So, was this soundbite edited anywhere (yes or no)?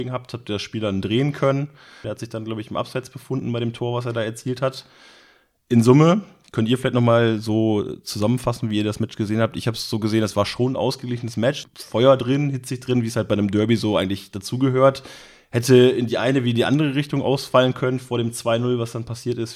yes